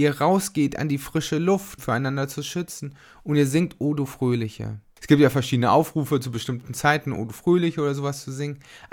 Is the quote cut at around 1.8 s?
yes; 1 cut; at 1.8 s

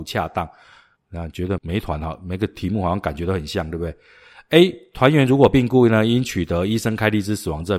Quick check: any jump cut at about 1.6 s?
yes; 1 cut; at 1.6 s

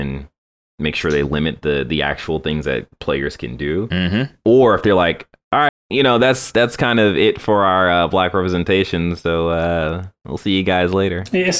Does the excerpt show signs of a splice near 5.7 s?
yes; 1 cut; at 5.7 s

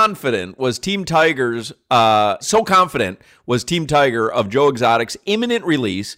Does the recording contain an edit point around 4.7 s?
no; 1 cut; at 2.4 s

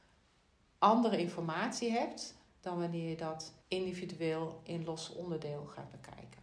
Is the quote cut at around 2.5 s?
yes; 2 cuts; at 2.5 s, 3.6 s

